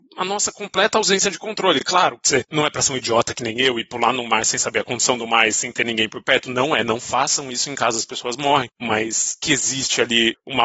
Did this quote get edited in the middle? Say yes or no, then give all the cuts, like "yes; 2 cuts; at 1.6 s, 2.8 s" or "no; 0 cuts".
no; 0 cuts